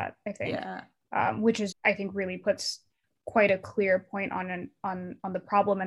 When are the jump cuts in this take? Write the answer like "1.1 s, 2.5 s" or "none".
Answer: 1.7 s